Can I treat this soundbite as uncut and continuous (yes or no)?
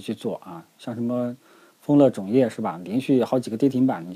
yes